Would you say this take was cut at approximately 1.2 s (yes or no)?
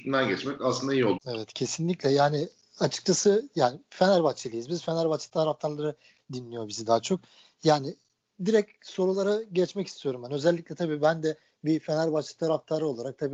yes